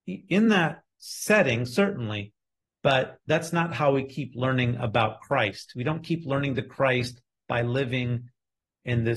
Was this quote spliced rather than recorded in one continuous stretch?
no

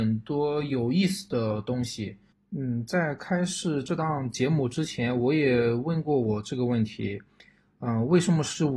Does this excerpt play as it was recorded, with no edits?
no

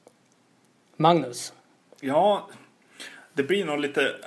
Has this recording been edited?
no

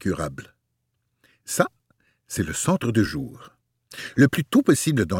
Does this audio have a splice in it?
no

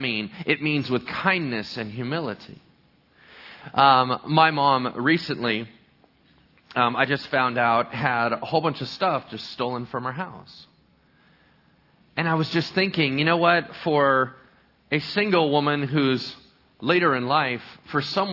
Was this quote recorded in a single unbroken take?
yes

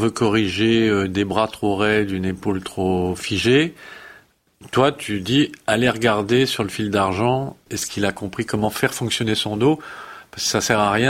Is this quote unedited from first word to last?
no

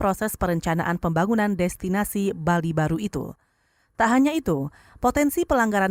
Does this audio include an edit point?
no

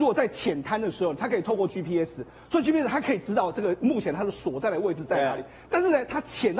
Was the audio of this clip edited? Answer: no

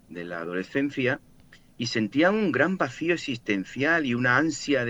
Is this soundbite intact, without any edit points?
yes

